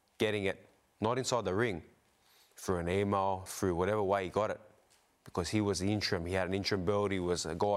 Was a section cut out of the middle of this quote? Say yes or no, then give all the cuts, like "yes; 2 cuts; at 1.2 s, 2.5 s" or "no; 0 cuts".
no; 0 cuts